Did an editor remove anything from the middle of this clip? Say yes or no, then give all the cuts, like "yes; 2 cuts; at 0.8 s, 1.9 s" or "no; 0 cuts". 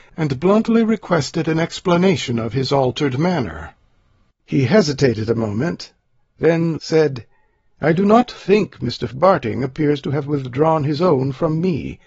yes; 2 cuts; at 6.8 s, 9.1 s